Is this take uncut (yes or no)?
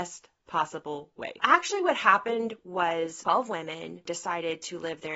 no